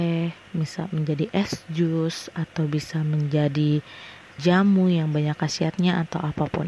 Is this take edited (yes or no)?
yes